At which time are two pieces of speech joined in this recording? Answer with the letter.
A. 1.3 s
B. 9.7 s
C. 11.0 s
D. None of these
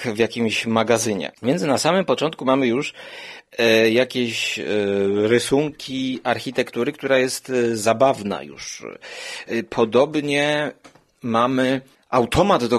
A